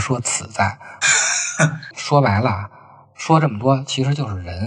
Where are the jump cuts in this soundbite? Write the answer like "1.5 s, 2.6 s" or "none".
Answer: 1.0 s